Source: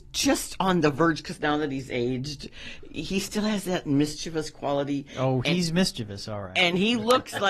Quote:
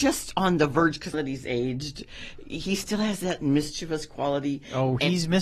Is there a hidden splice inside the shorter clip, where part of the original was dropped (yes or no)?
yes